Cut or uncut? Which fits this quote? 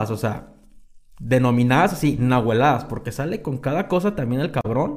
uncut